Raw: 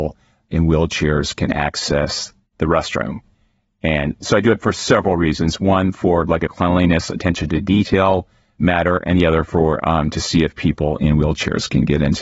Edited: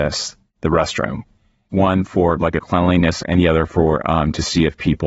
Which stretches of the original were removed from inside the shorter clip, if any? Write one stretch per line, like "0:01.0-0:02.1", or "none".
0:03.7-0:05.6
0:07.1-0:09.0